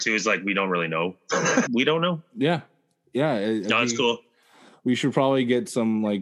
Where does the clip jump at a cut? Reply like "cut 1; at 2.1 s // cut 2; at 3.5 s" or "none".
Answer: cut 1; at 1.7 s